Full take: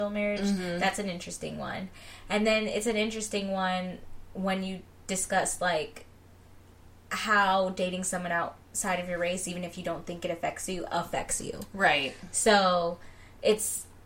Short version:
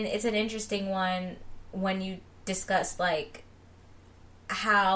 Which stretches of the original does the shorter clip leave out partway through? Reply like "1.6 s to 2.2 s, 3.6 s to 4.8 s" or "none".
none

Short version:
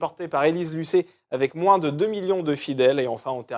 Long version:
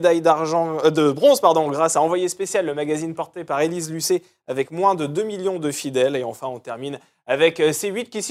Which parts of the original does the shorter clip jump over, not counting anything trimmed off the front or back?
none

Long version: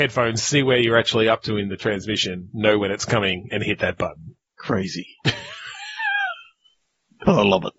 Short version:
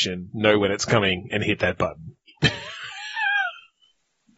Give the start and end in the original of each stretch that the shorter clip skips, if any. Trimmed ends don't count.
4.5 s to 5.1 s

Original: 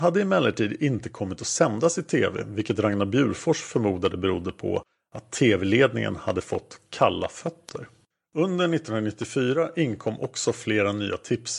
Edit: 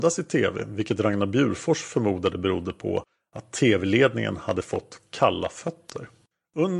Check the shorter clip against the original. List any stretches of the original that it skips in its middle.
none

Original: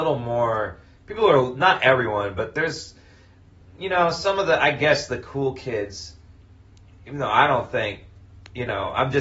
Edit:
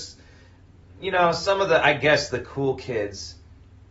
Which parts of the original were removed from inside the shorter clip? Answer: none

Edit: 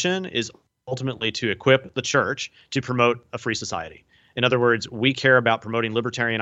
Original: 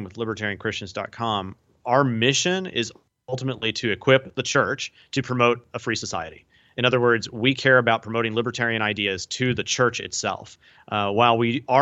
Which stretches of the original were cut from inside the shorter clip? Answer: none

